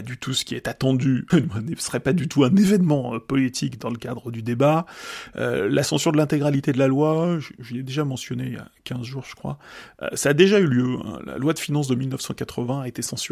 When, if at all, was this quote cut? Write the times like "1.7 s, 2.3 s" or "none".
1.3 s